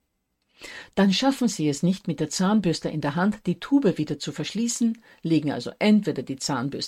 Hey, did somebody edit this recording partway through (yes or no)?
no